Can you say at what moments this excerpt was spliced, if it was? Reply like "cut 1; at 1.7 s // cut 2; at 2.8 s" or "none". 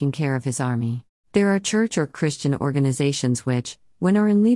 cut 1; at 1.2 s